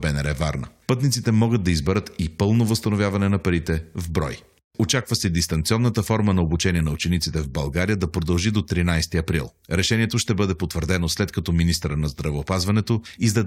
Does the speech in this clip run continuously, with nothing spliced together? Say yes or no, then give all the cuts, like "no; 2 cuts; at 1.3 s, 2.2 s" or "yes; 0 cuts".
yes; 0 cuts